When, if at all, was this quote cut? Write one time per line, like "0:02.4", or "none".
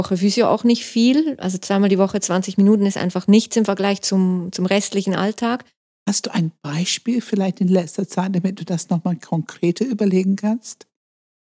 0:05.9

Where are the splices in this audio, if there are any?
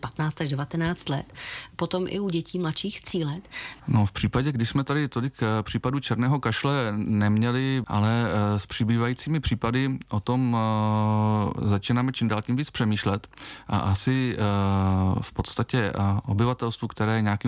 0:03.8
0:07.8

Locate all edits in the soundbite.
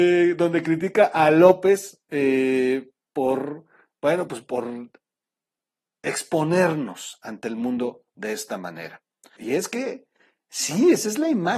0:09.4

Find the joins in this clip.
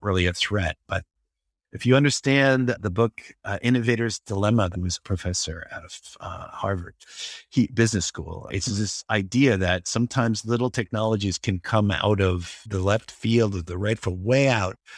0:04.7

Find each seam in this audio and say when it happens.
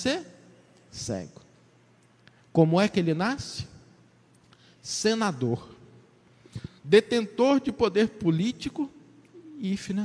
none

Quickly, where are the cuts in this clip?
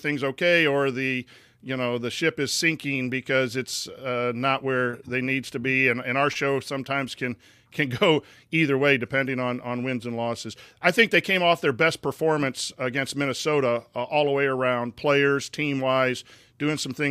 none

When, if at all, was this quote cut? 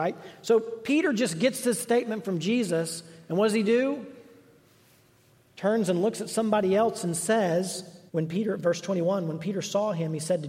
0:08.1

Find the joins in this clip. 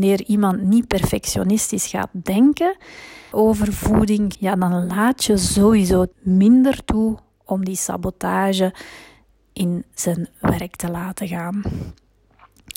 0:03.3
0:04.3
0:06.1

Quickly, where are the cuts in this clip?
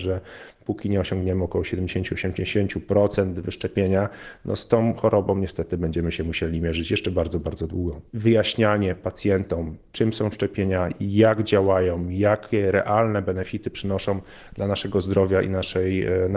0:08.1

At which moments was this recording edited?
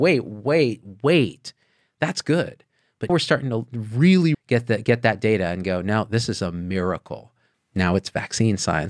0:03.1
0:04.3
0:07.5

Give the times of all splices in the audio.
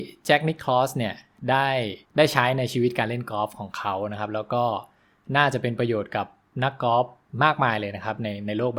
0:02.0

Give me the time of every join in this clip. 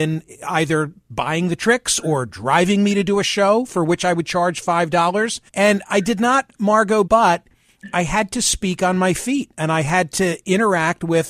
0:05.5
0:07.1

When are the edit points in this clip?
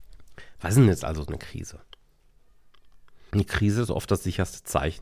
0:03.3

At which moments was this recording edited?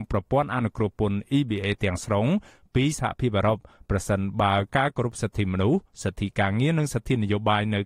none

